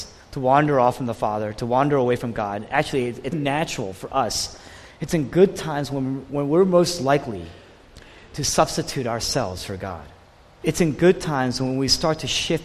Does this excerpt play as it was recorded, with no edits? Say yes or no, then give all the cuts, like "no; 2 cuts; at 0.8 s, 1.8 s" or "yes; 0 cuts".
no; 2 cuts; at 3.3 s, 10.6 s